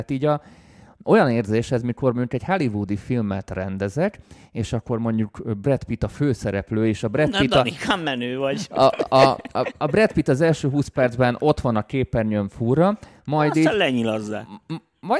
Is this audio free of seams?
yes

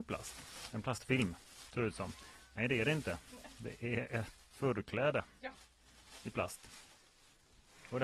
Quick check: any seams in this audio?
yes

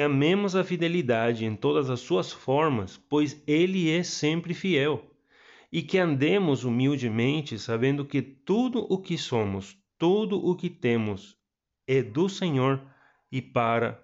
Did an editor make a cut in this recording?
no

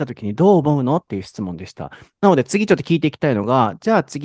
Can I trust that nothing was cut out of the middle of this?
no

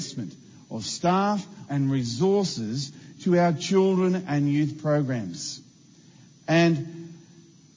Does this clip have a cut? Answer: yes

